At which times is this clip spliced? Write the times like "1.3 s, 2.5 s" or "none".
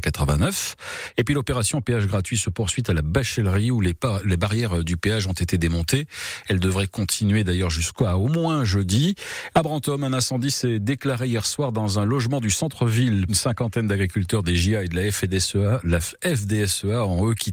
9.5 s, 13.3 s